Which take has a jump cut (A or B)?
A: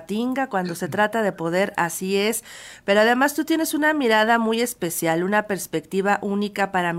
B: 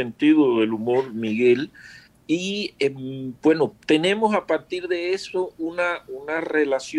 B